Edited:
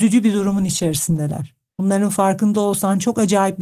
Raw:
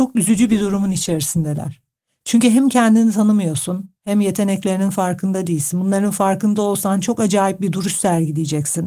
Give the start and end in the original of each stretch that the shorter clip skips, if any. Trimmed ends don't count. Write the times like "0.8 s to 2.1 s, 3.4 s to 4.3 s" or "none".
2.1 s to 5.8 s